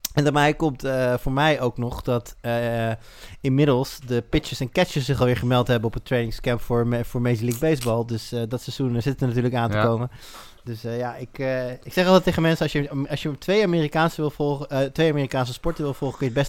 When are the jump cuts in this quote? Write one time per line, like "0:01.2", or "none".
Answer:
none